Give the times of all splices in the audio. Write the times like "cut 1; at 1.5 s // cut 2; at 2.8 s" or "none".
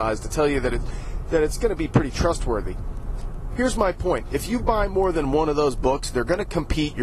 none